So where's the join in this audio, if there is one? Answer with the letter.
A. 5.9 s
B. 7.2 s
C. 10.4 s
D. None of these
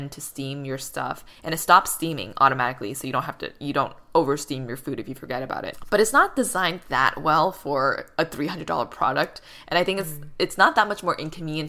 D